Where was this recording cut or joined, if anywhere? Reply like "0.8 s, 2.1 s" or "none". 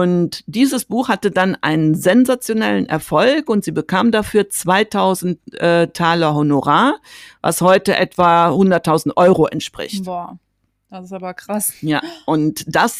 none